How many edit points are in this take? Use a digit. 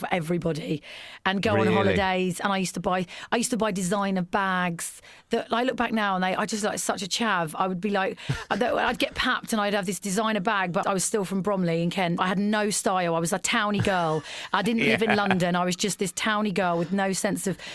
2